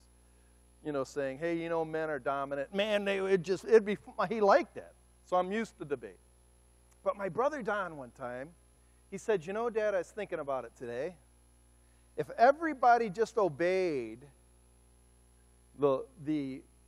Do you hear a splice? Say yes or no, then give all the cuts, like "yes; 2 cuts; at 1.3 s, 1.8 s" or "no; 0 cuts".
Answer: no; 0 cuts